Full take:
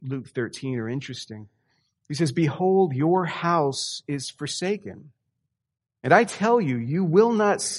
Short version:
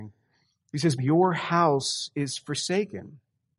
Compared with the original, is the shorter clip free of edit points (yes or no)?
no